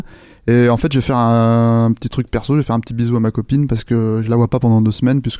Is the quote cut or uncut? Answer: uncut